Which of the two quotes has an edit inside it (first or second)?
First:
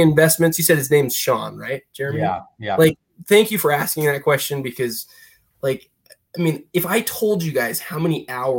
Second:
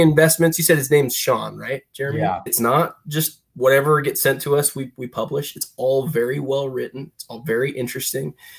second